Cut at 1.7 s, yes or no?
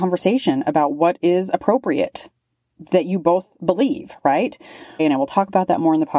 no